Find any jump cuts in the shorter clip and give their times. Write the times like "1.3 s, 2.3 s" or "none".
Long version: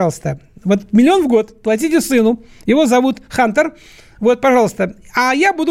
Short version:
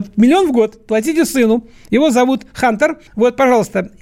3.1 s